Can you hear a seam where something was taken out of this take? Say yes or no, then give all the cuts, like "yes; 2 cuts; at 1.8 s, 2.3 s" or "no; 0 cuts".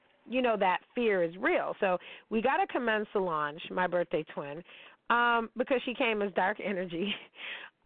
yes; 1 cut; at 1.8 s